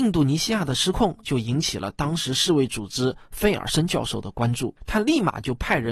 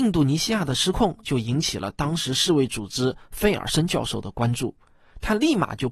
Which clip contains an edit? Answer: first; 1 cut; at 4.8 s

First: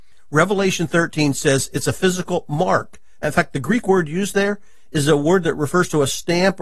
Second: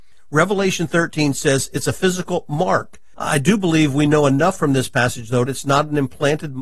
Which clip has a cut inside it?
second; 2 cuts; at 3.1 s, 5.5 s

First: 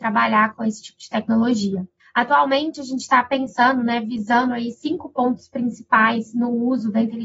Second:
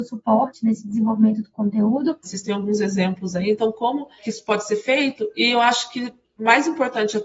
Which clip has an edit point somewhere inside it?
second; 1 cut; at 2.2 s

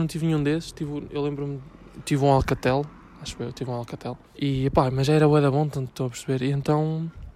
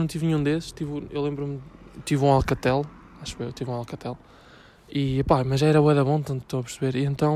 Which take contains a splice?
first; 1 cut; at 4.3 s

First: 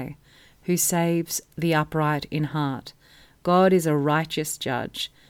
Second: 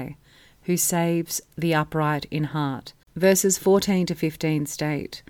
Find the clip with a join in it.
second; 1 cut; at 3.0 s

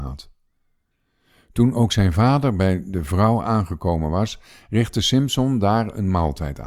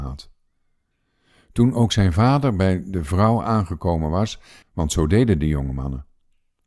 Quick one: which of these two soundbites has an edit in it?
second; 1 cut; at 4.6 s

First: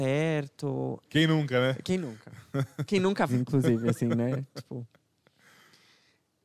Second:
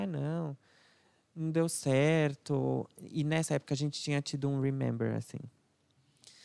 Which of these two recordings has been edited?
first; 2 cuts; at 1.0 s, 3.3 s

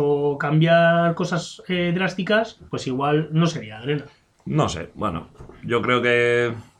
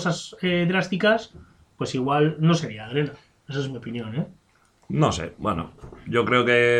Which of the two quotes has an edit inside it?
first; 2 cuts; at 2.7 s, 4.3 s

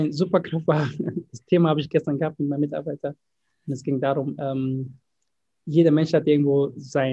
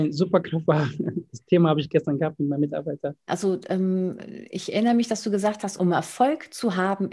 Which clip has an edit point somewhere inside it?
second; 2 cuts; at 3.3 s, 5.8 s

